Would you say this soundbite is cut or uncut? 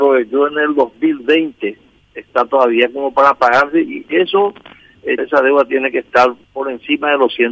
cut